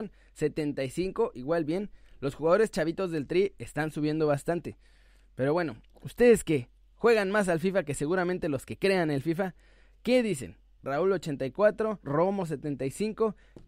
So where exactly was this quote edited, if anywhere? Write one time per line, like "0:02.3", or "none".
0:05.9
0:10.8
0:12.0

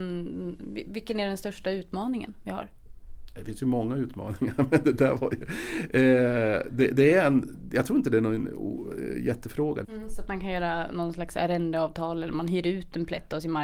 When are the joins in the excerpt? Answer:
0:09.8

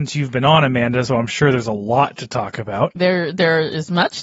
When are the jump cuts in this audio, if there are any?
0:01.1
0:03.0

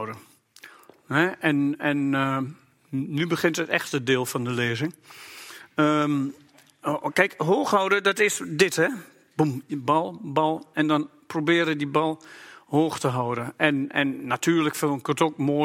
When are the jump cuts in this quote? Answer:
none

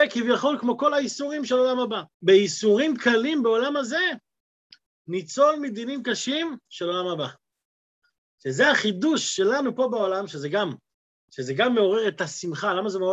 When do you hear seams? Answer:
0:02.1

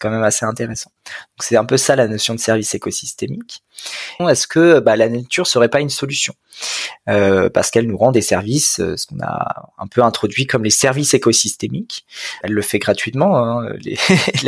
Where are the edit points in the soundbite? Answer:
0:04.2
0:12.4

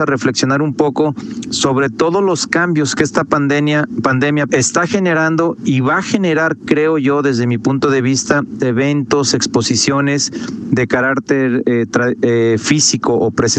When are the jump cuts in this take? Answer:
0:04.5
0:08.6

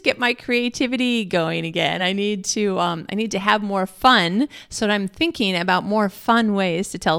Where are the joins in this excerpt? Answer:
none

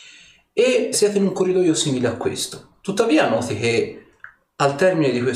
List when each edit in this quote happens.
0:00.9
0:02.8

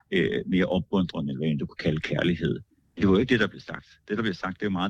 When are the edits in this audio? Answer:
none

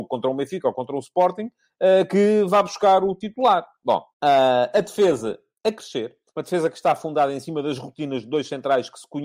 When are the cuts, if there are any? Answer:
0:04.1
0:06.3

